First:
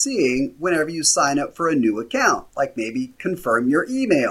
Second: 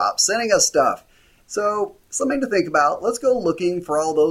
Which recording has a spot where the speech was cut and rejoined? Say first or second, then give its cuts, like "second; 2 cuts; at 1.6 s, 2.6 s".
second; 1 cut; at 1.4 s